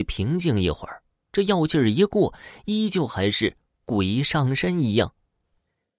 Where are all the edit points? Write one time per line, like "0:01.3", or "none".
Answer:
none